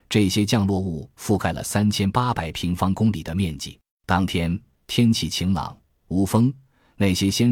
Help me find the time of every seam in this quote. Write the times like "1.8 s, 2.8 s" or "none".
3.9 s

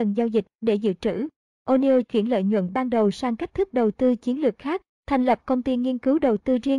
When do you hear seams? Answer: 5.0 s

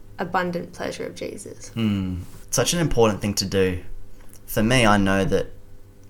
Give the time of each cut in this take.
2.4 s

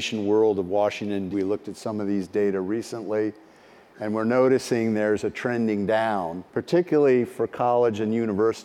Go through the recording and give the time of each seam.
1.3 s, 6.5 s

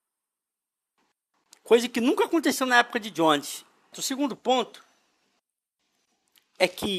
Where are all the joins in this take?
3.9 s

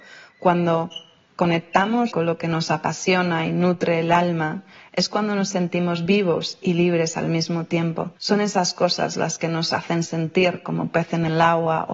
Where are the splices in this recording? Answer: 2.1 s, 8.2 s

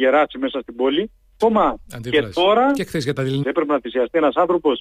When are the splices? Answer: 1.4 s, 3.4 s

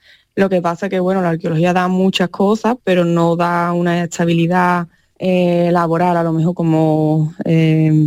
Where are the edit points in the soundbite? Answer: none

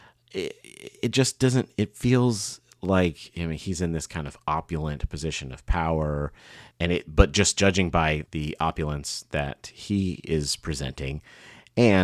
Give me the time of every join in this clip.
6.7 s, 8.3 s

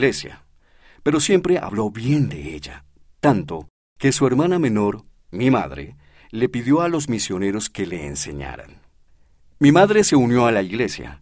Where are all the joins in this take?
none

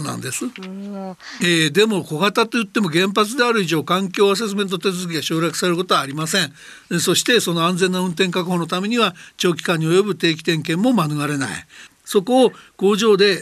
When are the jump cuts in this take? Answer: 1.4 s, 11.9 s

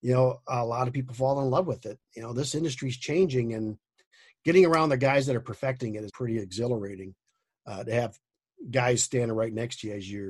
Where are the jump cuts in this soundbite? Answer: 6.1 s

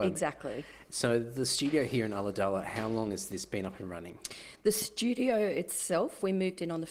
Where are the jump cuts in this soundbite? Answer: none

